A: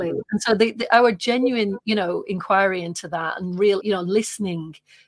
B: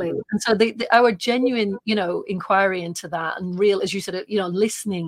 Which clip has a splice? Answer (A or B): A